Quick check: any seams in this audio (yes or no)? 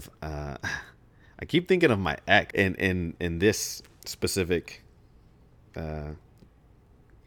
yes